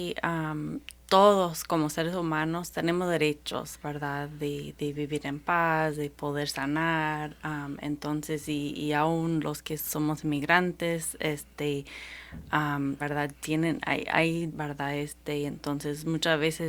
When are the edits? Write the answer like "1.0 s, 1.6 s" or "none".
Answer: 13.0 s, 14.5 s